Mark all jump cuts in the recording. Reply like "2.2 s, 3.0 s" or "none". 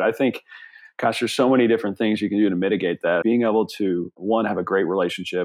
3.2 s